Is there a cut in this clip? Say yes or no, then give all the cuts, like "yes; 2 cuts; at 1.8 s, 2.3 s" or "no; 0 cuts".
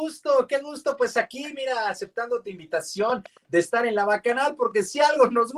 no; 0 cuts